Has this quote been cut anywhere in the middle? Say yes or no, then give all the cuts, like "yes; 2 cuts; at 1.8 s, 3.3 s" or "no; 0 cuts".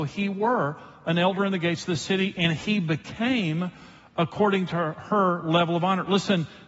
no; 0 cuts